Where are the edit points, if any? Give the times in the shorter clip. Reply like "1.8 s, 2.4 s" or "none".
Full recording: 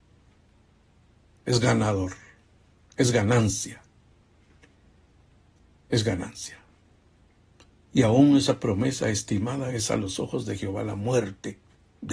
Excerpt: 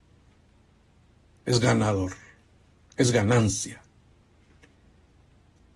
none